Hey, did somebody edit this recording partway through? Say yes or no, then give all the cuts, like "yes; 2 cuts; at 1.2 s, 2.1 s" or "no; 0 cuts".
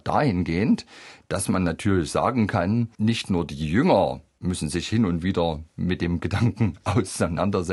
yes; 1 cut; at 2.9 s